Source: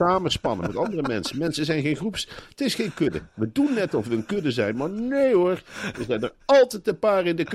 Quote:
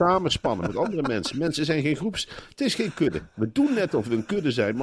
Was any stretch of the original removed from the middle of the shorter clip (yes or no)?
no